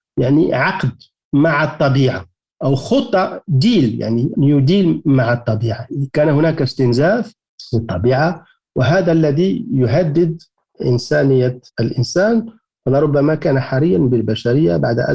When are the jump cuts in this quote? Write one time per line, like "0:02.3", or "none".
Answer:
0:11.7